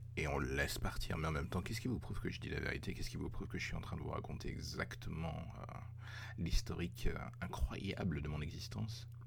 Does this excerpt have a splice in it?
no; 0 cuts

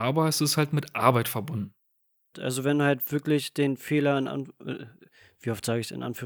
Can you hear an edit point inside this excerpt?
yes; 1 cut; at 2.3 s

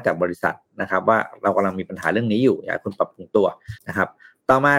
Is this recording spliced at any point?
yes; 1 cut; at 3.8 s

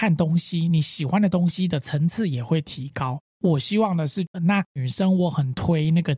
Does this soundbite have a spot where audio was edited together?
yes; 1 cut; at 4.3 s

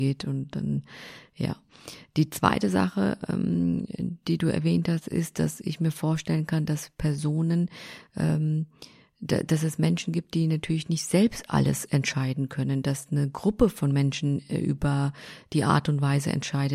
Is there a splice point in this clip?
no; 0 cuts

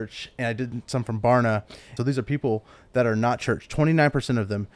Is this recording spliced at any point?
yes; 1 cut; at 2.0 s

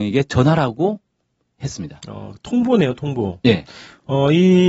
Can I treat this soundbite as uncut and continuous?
yes; 0 cuts

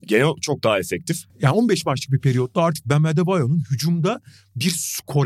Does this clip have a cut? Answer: yes; 1 cut; at 1.3 s

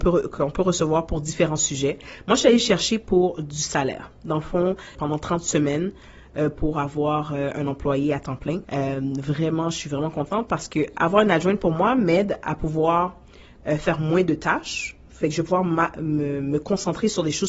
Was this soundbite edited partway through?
yes; 2 cuts; at 5.0 s, 8.6 s

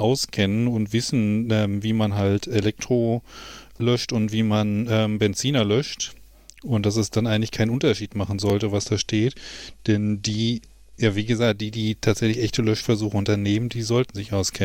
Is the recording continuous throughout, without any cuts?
yes; 0 cuts

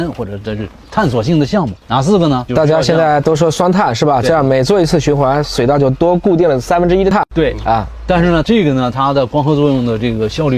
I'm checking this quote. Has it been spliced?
yes; 2 cuts; at 2.5 s, 8.4 s

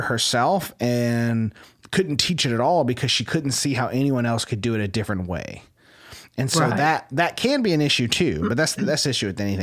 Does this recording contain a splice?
no; 0 cuts

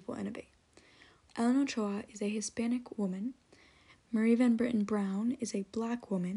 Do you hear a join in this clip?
yes; 1 cut; at 1.3 s

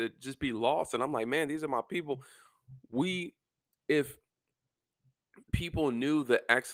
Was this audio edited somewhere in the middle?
no; 0 cuts

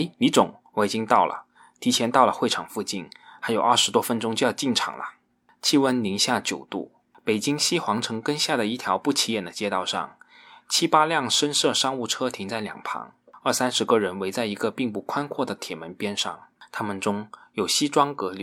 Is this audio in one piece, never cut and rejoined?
yes; 0 cuts

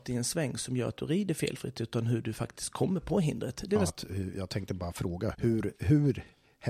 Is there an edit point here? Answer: yes; 2 cuts; at 3.9 s, 5.3 s

